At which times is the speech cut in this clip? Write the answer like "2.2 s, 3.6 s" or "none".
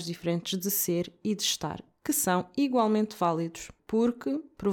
3.8 s